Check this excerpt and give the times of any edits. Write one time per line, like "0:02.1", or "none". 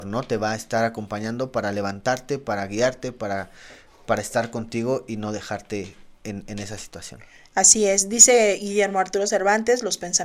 none